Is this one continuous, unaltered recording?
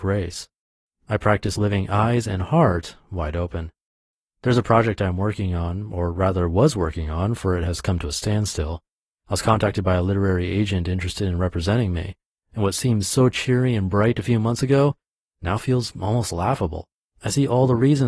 yes; 0 cuts

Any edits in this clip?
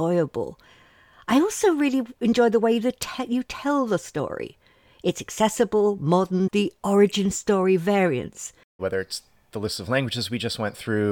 yes; 1 cut; at 8.8 s

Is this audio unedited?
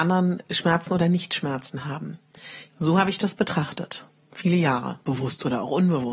no; 1 cut; at 2.7 s

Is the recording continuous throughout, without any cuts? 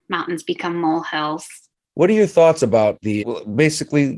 no; 2 cuts; at 1.8 s, 3.2 s

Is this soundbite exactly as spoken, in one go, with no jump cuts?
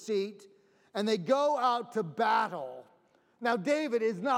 yes; 0 cuts

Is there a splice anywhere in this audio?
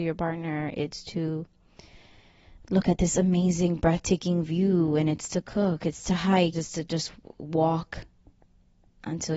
yes; 1 cut; at 6.5 s

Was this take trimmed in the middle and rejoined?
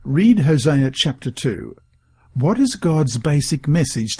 no; 0 cuts

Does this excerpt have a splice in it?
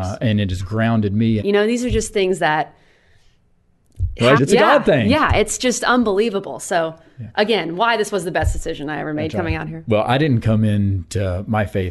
yes; 2 cuts; at 1.4 s, 4.4 s

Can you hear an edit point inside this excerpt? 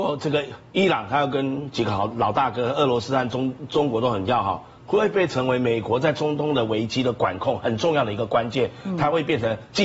no; 0 cuts

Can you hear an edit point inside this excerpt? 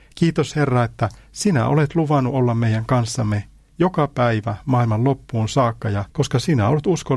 yes; 1 cut; at 6.1 s

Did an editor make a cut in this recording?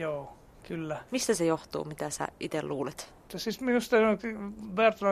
yes; 2 cuts; at 1.1 s, 3.3 s

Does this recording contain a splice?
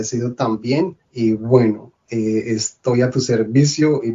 yes; 1 cut; at 1.0 s

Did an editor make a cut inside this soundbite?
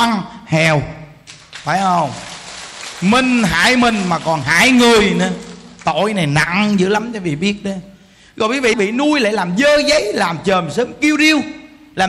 yes; 1 cut; at 8.7 s

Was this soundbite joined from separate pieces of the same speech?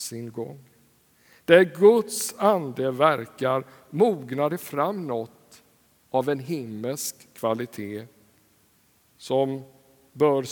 no; 0 cuts

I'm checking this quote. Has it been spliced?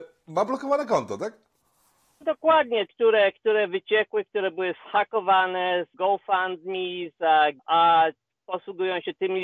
yes; 3 cuts; at 2.9 s, 5.9 s, 7.6 s

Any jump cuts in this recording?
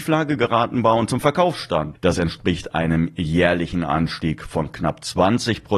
yes; 1 cut; at 1.9 s

